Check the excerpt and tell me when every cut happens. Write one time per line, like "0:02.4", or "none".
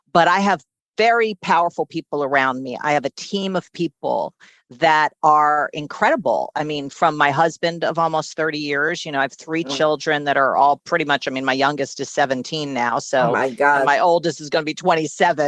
none